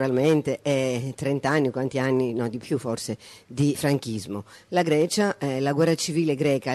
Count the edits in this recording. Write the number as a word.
one